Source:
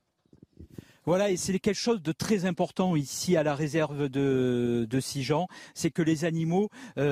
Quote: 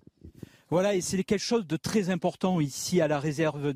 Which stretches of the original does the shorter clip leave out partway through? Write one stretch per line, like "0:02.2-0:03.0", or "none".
none